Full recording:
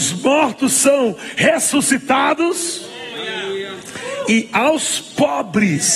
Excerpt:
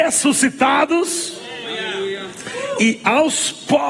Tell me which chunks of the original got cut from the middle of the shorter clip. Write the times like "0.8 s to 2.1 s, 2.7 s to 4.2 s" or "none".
none